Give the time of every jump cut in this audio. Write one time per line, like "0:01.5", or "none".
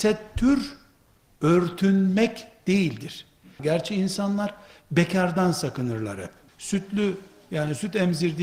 0:03.6
0:06.5

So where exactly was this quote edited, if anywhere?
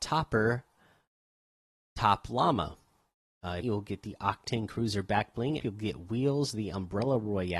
0:03.6
0:05.6

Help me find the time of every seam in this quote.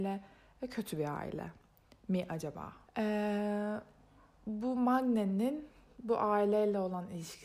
0:02.9

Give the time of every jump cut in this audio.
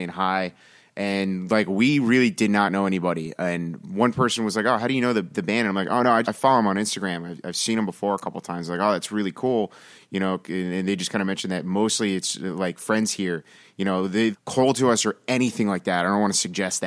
0:06.2
0:14.3

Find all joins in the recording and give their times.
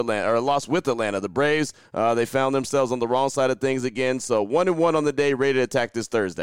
none

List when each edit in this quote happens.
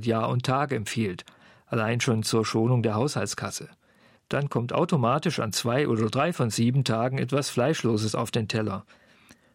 0:04.2

